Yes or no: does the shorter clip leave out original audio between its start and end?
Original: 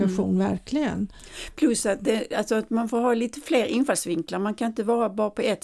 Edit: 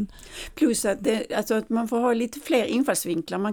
no